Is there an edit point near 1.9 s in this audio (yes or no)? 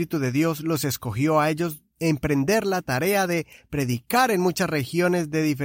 yes